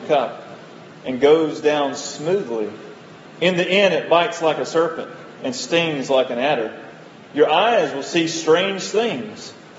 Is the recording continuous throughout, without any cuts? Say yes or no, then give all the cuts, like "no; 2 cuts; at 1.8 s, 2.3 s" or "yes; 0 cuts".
yes; 0 cuts